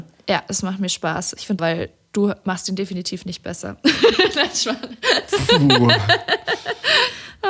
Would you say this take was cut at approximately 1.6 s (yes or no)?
yes